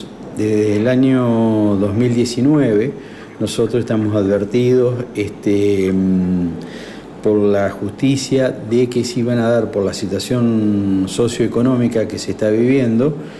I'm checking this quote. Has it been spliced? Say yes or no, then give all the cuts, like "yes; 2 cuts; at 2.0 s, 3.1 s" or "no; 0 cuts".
no; 0 cuts